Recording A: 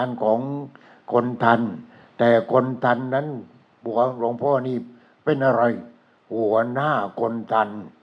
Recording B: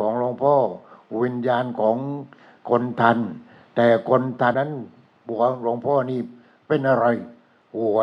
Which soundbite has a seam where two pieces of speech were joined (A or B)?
B